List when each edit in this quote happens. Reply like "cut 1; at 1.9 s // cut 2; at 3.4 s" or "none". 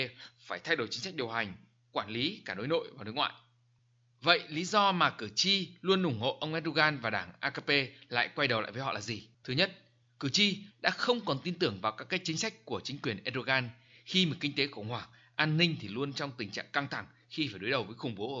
cut 1; at 9.3 s // cut 2; at 10.7 s